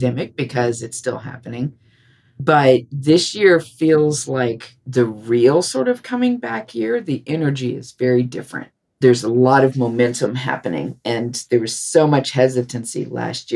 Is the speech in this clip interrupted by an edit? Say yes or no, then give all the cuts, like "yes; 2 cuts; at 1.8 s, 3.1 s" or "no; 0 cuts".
no; 0 cuts